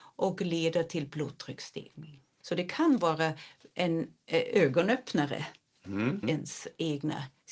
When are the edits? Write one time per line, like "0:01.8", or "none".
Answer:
0:02.4
0:06.2